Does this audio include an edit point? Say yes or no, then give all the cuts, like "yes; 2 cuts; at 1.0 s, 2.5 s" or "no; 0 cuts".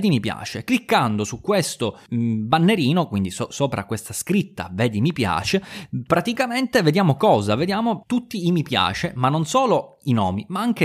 no; 0 cuts